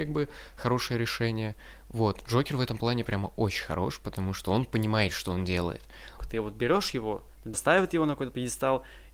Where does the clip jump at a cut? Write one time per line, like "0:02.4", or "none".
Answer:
0:06.2
0:07.5

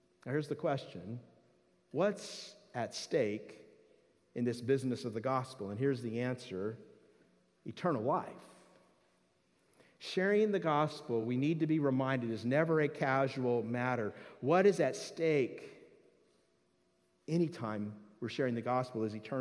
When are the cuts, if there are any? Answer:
none

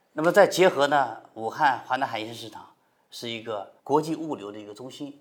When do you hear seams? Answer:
none

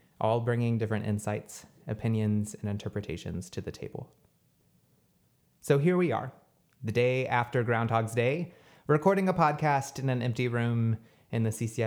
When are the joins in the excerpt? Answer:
none

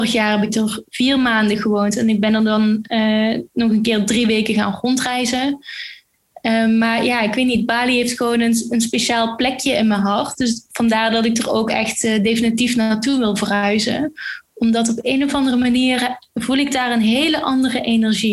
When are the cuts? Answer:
none

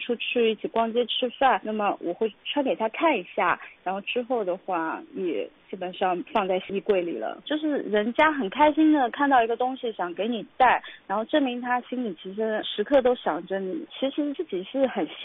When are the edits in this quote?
none

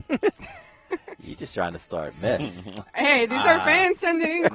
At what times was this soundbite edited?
none

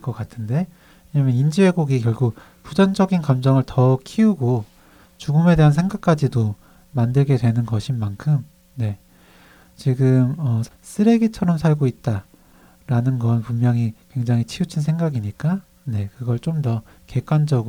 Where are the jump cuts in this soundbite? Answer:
0:10.7

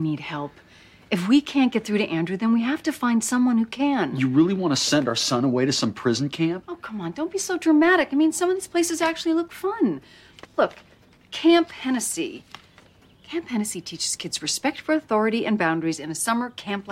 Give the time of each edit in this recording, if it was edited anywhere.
none

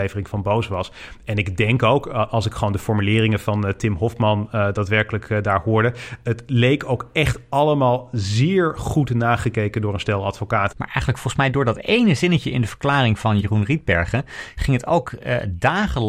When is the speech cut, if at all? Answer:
0:10.7

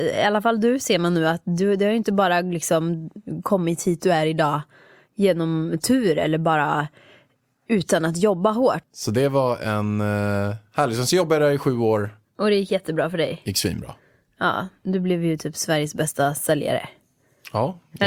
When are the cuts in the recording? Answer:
0:08.8

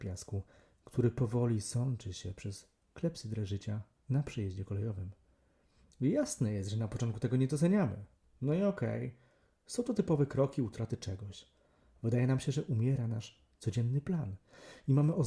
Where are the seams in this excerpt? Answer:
none

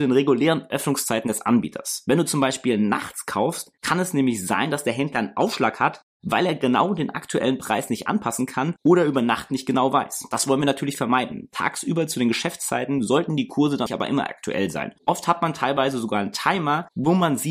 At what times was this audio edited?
0:13.9

